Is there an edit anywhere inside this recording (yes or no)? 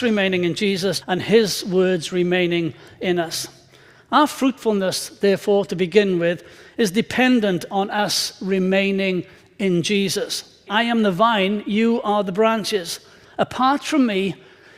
yes